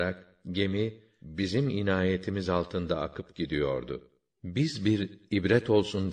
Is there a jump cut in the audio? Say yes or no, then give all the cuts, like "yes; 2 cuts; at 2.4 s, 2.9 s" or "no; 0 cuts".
no; 0 cuts